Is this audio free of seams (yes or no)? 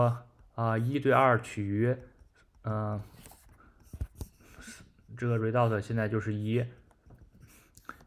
yes